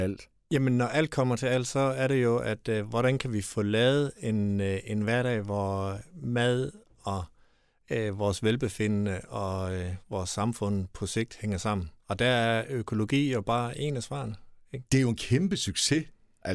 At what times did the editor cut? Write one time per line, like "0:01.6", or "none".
0:12.0
0:14.9